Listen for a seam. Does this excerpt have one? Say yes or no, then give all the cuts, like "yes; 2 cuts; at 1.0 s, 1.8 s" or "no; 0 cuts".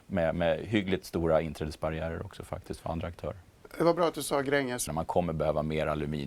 yes; 1 cut; at 4.9 s